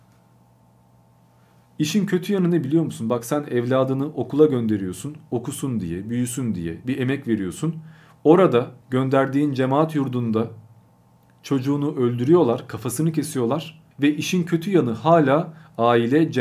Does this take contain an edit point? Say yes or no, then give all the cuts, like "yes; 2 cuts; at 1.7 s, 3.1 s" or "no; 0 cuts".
yes; 2 cuts; at 8.8 s, 13.9 s